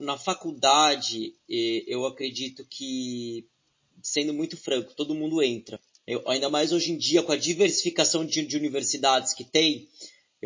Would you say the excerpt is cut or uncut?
uncut